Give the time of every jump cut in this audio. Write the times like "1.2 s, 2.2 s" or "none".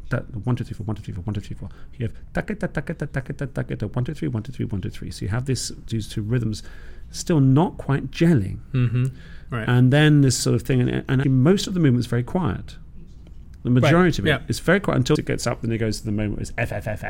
11.2 s, 15.1 s